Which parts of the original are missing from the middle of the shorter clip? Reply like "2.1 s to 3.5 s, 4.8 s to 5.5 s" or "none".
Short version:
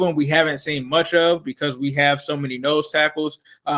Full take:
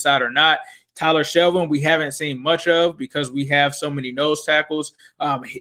none